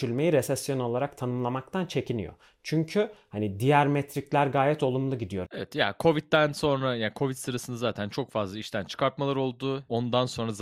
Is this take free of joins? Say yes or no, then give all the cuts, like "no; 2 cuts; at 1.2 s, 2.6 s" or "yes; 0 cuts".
no; 1 cut; at 5.4 s